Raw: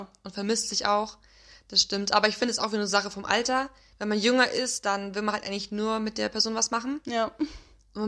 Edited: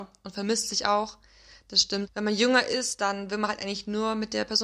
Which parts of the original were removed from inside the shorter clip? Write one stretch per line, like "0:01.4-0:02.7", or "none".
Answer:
0:02.1-0:03.9